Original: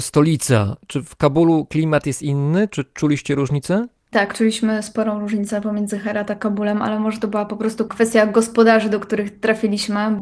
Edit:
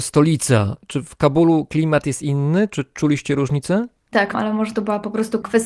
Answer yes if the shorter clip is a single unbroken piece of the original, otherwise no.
no